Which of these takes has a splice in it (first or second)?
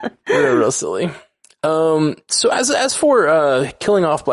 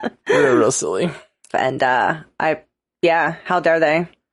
second